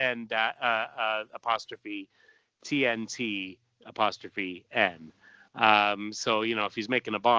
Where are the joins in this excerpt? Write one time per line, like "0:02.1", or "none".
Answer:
none